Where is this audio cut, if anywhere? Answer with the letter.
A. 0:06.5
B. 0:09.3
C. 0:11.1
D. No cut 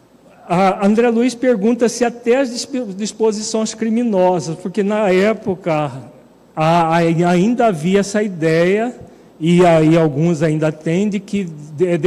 D